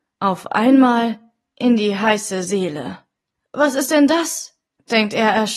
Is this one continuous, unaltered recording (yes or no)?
yes